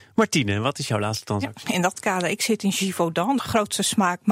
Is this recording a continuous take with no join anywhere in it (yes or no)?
no